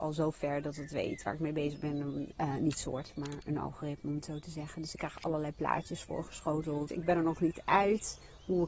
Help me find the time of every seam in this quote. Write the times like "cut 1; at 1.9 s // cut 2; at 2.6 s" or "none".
cut 1; at 2.3 s // cut 2; at 6.9 s